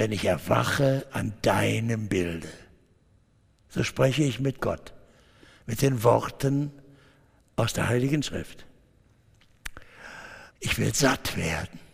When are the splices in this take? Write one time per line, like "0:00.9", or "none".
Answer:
0:10.5